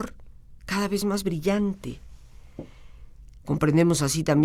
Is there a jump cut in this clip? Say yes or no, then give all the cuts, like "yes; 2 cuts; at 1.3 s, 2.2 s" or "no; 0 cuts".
yes; 1 cut; at 3.4 s